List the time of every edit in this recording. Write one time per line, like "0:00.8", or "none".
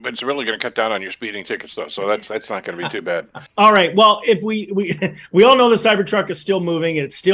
0:03.5